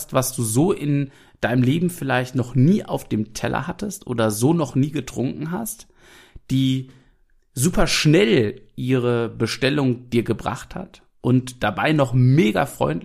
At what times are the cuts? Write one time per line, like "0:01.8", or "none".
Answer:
none